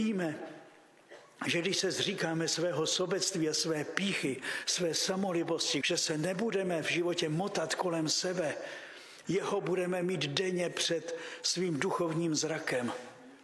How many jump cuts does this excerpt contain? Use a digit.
2